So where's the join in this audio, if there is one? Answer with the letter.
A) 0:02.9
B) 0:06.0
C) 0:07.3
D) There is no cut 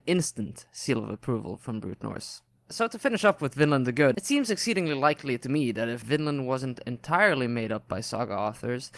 D